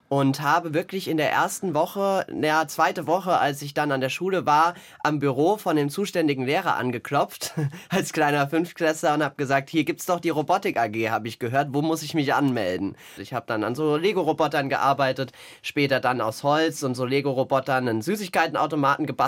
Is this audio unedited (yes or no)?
no